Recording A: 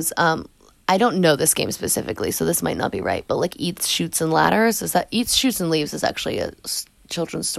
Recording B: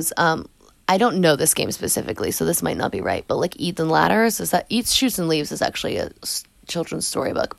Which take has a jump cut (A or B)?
B